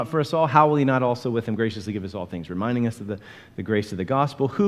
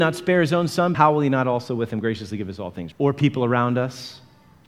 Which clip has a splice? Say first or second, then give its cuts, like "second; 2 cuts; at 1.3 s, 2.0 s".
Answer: second; 2 cuts; at 0.9 s, 2.9 s